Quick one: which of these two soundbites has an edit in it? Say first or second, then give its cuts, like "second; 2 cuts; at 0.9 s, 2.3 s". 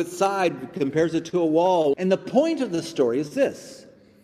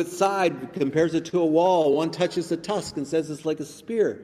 first; 1 cut; at 1.9 s